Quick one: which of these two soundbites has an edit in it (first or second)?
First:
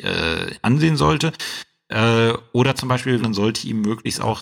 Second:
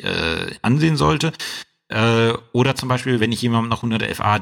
first